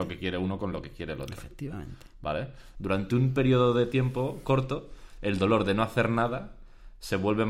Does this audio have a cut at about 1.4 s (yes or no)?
no